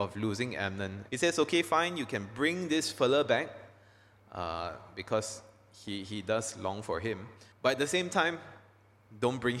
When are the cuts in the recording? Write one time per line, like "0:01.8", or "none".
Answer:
0:01.1
0:07.5